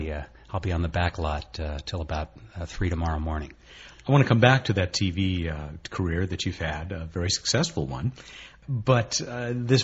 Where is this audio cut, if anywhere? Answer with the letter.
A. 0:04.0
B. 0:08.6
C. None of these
C